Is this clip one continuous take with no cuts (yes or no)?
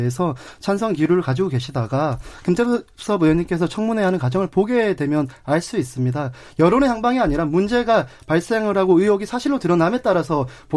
yes